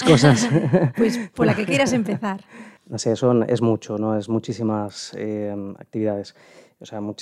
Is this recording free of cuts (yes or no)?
no